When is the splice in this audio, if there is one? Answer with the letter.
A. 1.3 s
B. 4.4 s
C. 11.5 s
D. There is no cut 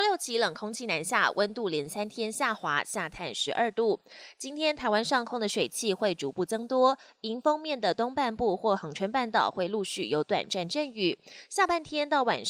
D